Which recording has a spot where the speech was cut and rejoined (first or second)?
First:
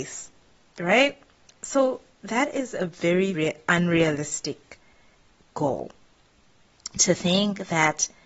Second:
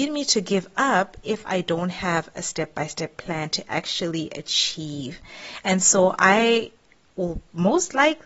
first